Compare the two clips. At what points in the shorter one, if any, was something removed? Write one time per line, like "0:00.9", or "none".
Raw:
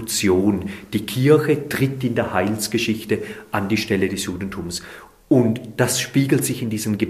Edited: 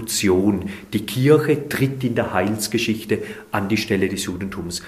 none